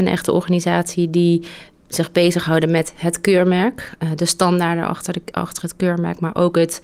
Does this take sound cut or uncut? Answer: uncut